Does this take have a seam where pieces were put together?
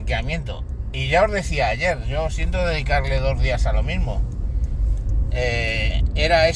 no; 0 cuts

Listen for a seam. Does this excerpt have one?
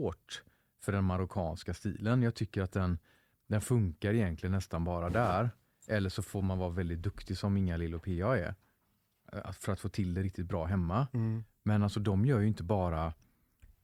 no; 0 cuts

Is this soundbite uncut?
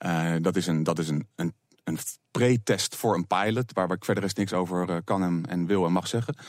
yes; 0 cuts

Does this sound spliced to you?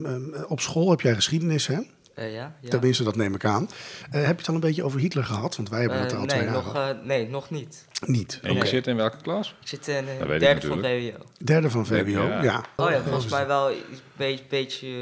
yes; 1 cut; at 12.8 s

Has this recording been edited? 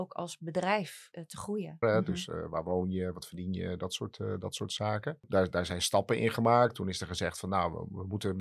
yes; 1 cut; at 1.8 s

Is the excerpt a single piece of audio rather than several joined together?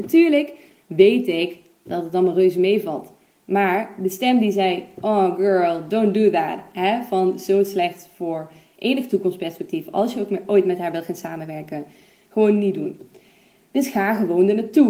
yes; 0 cuts

